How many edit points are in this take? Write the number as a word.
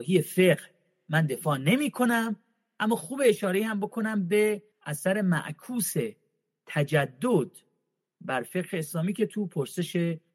one